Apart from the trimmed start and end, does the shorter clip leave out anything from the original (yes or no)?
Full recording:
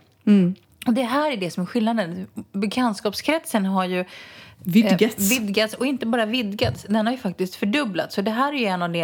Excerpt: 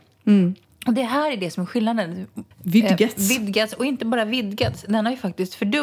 yes